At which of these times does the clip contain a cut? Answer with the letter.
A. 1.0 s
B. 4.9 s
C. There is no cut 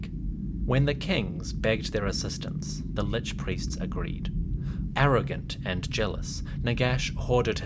B